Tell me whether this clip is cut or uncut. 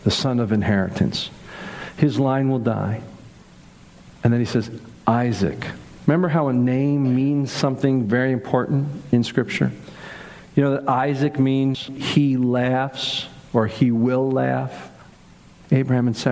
uncut